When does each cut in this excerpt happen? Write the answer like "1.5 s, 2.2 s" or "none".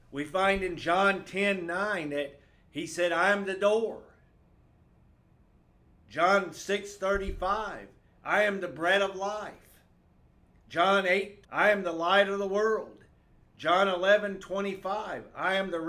11.4 s